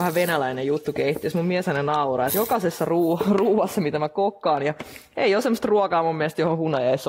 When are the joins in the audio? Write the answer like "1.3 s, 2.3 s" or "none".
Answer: 2.3 s